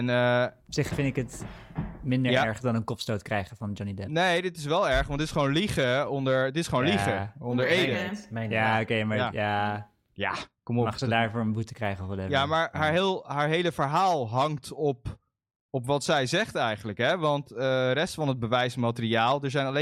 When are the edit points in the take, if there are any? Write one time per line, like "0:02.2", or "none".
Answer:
none